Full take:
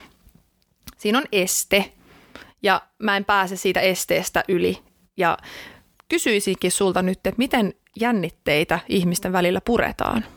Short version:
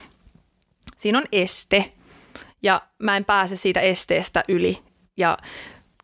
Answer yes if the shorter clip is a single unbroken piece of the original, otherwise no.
yes